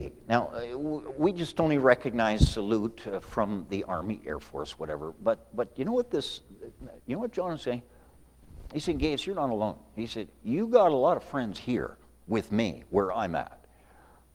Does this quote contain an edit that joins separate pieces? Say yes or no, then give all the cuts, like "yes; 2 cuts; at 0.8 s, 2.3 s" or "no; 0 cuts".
no; 0 cuts